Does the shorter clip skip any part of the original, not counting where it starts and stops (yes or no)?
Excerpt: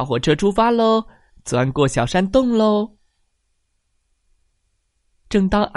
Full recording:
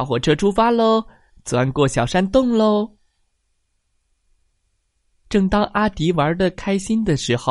no